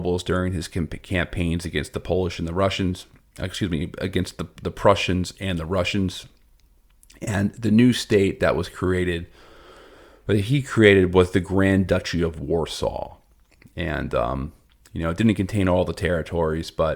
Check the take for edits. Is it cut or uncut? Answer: uncut